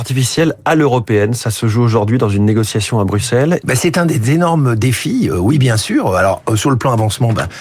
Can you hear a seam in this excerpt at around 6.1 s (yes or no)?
no